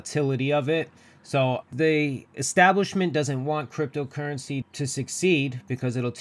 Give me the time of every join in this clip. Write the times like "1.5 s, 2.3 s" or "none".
1.6 s, 4.6 s